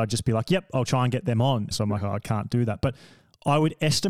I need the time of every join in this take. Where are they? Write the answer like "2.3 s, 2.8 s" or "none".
1.7 s